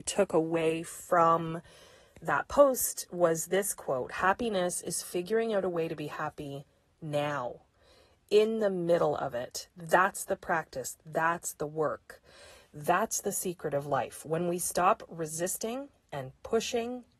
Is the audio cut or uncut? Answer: uncut